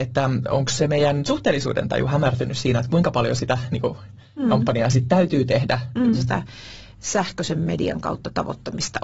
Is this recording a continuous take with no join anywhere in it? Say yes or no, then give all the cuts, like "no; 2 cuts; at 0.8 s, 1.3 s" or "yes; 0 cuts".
no; 1 cut; at 6.1 s